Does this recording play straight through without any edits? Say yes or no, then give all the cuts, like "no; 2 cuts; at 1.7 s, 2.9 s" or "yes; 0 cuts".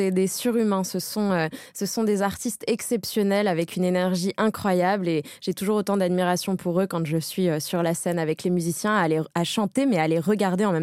yes; 0 cuts